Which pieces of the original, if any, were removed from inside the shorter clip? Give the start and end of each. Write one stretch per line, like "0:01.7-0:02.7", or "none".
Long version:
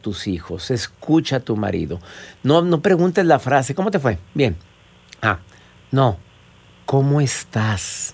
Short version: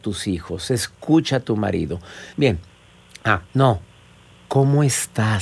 0:02.3-0:04.3
0:05.5-0:05.9